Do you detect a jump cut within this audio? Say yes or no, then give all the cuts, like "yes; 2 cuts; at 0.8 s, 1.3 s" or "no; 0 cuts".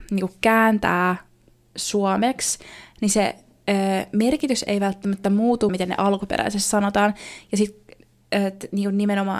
yes; 1 cut; at 5.7 s